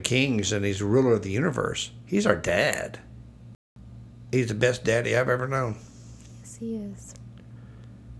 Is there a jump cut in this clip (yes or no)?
no